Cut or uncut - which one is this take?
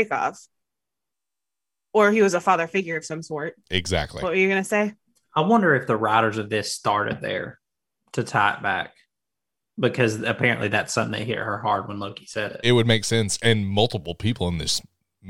uncut